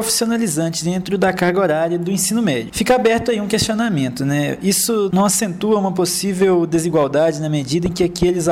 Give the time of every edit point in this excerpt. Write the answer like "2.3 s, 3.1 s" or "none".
none